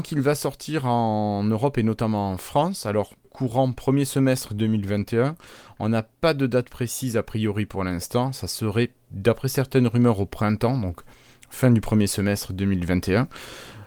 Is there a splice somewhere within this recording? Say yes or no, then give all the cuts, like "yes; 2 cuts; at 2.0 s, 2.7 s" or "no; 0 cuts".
yes; 1 cut; at 3.2 s